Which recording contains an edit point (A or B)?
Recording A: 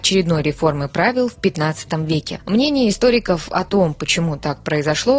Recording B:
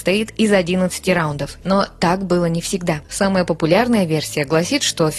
B